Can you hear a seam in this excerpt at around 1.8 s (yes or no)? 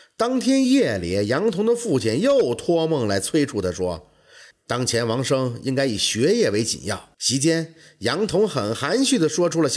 no